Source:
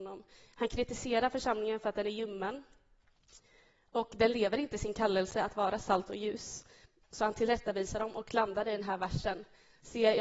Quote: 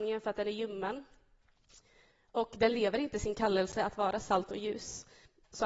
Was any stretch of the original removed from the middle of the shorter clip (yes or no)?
no